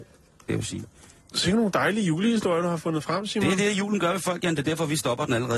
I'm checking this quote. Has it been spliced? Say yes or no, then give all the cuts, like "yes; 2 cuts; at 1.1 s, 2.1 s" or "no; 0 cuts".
no; 0 cuts